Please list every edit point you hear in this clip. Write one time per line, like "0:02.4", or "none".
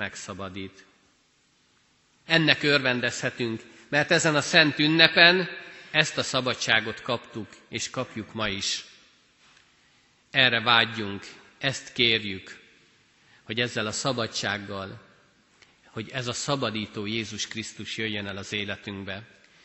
0:02.2